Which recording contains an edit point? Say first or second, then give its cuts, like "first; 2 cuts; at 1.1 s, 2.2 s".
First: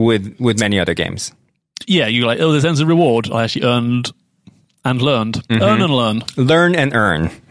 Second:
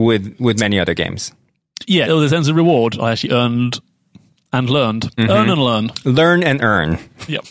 second; 1 cut; at 2.1 s